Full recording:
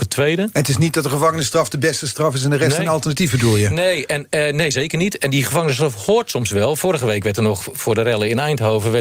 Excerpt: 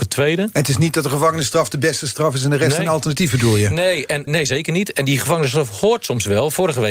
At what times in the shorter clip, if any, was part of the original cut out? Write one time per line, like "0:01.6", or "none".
0:04.3